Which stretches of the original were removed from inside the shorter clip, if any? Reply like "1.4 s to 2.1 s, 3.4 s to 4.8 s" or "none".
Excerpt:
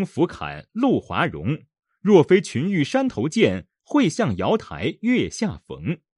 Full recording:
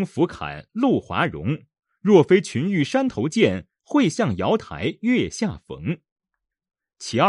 none